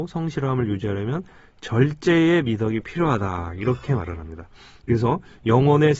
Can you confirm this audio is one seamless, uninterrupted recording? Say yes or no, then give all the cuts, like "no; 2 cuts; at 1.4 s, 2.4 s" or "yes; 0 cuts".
yes; 0 cuts